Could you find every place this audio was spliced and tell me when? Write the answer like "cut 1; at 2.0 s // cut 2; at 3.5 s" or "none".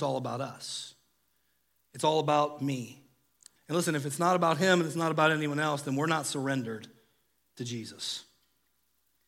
cut 1; at 3.6 s